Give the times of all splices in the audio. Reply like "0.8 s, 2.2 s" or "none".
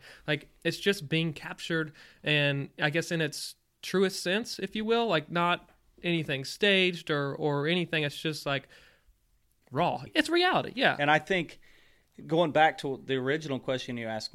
10.1 s